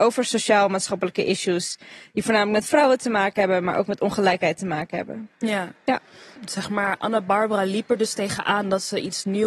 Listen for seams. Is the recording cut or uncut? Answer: uncut